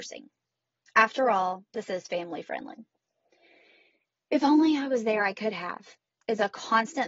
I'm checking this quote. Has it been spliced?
no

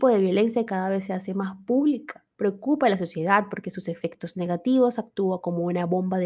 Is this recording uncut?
no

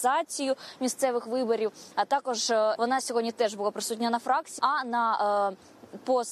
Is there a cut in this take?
yes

